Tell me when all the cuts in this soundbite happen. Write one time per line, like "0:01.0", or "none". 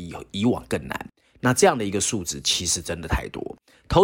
0:01.4